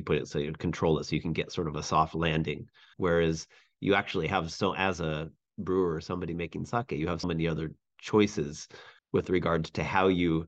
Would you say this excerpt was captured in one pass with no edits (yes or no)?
no